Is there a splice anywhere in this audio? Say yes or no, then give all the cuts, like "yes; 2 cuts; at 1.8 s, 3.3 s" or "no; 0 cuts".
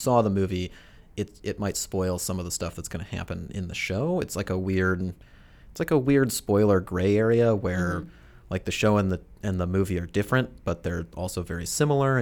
no; 0 cuts